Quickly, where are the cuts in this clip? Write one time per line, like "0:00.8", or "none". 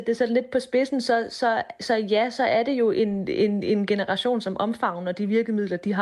none